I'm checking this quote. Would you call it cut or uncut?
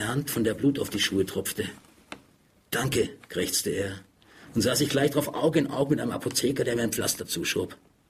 uncut